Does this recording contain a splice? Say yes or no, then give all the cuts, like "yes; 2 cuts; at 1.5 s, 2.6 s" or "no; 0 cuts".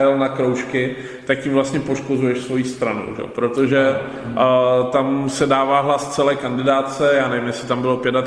no; 0 cuts